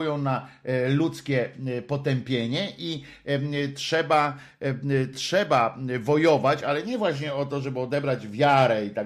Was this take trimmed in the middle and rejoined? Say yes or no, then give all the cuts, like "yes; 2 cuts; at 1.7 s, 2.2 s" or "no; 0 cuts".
no; 0 cuts